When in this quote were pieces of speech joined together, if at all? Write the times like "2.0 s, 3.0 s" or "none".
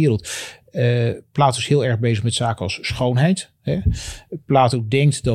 none